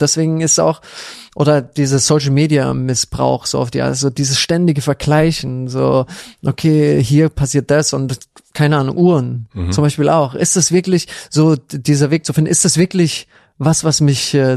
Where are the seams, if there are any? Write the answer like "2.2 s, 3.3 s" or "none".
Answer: none